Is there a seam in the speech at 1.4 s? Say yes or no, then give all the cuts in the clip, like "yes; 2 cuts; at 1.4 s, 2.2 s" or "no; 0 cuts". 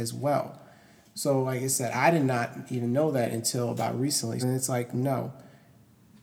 no; 1 cut; at 4.4 s